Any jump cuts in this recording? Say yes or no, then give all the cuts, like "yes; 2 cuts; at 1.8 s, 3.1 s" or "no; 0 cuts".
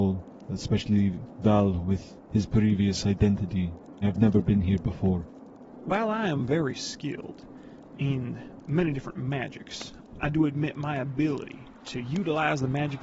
yes; 1 cut; at 4.0 s